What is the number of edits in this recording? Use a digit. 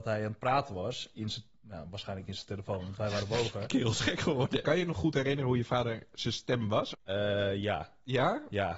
2